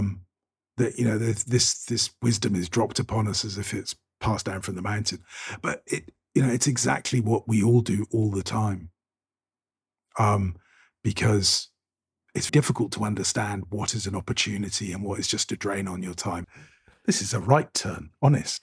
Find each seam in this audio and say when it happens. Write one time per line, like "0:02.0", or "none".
0:12.5
0:16.4